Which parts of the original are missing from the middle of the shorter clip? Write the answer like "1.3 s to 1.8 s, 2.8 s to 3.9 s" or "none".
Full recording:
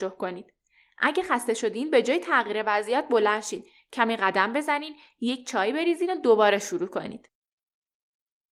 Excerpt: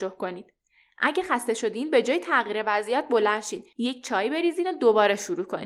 3.7 s to 5.2 s